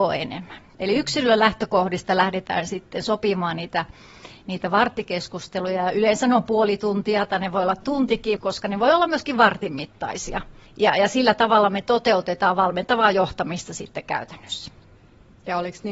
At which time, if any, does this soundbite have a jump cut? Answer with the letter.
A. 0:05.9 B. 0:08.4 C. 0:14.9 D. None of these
B